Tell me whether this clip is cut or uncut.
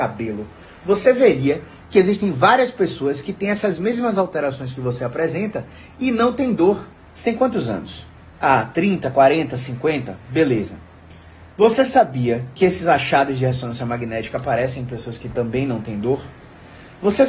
cut